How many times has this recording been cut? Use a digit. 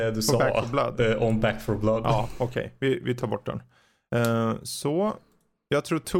0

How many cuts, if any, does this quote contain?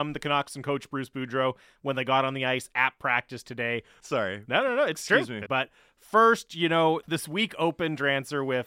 3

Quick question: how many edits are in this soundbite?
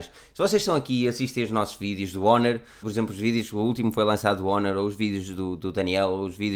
1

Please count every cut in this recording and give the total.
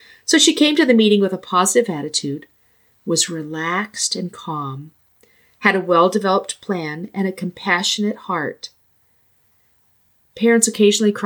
0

